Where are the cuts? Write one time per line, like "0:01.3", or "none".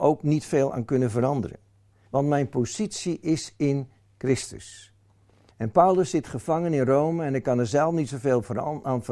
0:02.1
0:05.5